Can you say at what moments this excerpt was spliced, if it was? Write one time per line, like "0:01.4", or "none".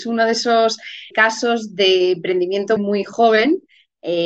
0:01.1
0:02.8